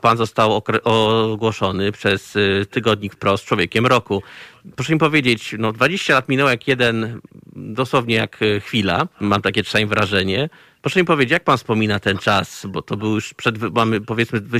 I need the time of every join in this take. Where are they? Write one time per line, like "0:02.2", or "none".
0:09.1